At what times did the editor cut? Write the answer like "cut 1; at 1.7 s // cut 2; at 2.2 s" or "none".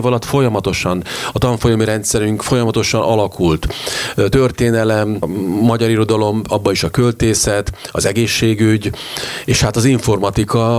none